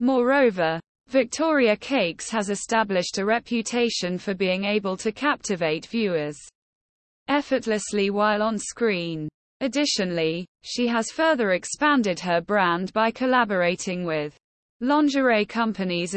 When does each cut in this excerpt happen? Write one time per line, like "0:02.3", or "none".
0:09.5